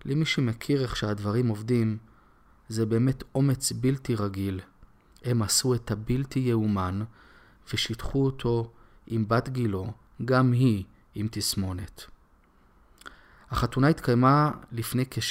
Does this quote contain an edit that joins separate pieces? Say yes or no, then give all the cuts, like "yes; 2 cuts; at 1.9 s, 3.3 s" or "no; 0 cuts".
no; 0 cuts